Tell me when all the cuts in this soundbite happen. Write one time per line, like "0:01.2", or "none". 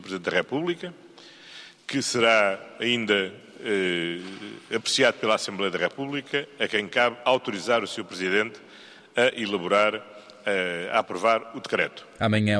none